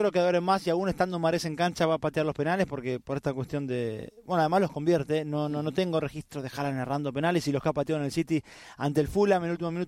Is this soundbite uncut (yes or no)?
yes